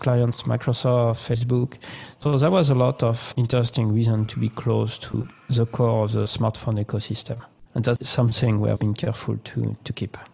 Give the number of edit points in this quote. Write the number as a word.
two